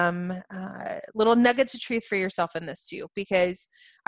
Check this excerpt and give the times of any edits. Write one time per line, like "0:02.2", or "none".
none